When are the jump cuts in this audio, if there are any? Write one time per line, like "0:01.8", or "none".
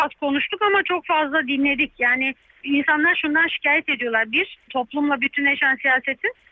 0:04.7